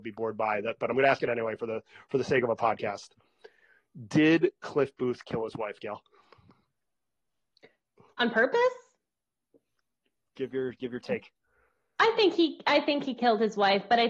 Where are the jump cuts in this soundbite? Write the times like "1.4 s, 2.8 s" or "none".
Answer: 10.3 s